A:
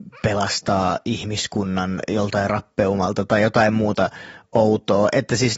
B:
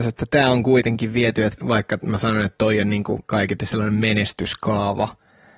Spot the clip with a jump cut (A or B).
B